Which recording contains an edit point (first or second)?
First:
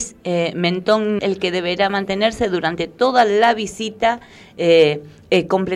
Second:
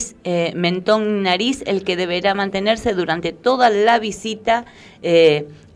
first